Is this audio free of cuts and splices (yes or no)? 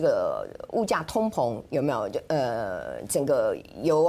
yes